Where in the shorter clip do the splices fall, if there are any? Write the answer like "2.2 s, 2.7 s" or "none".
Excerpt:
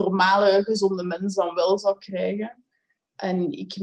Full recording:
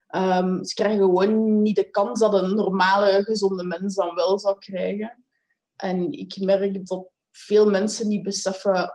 none